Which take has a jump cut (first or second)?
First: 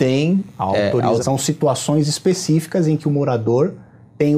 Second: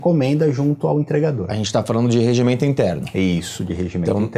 first